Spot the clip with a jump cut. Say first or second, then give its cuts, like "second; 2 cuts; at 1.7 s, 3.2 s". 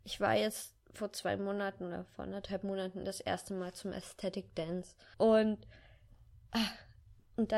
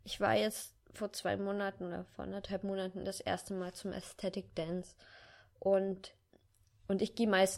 first; 1 cut; at 5.1 s